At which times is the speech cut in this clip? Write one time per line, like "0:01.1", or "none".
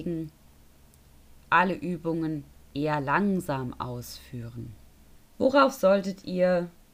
0:05.2

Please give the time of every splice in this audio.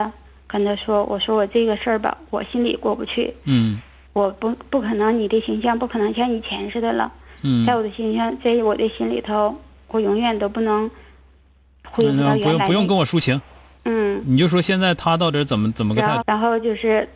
0:16.2

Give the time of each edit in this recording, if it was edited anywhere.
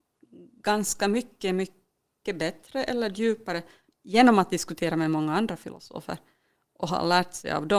none

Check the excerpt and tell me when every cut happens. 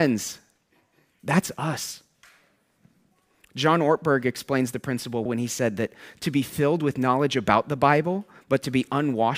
0:05.3

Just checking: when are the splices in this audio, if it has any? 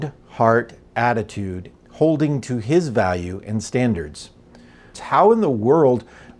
0:01.7
0:04.9

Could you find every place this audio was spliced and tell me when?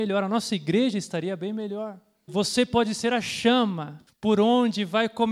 0:02.3

